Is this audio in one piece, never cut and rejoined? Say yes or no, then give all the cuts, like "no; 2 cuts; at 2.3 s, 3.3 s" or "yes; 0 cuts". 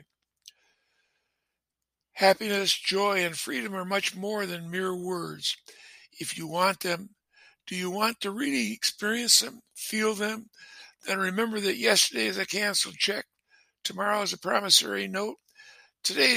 yes; 0 cuts